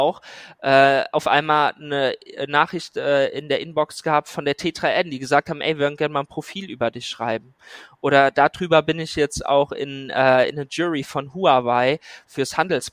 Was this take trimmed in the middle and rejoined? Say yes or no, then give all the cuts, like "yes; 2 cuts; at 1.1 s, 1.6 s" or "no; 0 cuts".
no; 0 cuts